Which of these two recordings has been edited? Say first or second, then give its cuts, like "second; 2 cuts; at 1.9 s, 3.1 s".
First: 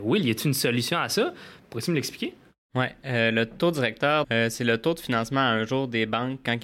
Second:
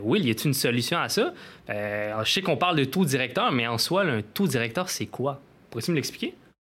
first; 2 cuts; at 1.6 s, 4.2 s